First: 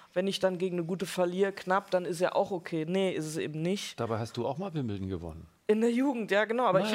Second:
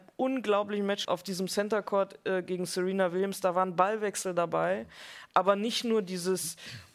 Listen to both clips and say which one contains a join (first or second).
second